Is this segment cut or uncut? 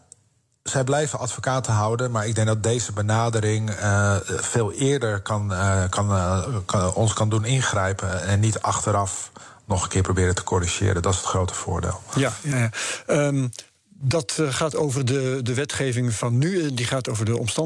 uncut